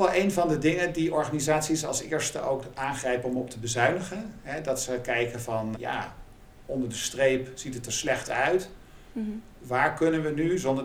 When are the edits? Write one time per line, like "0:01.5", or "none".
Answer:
0:05.7